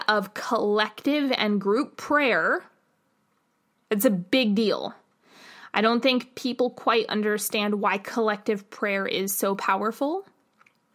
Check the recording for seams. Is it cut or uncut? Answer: uncut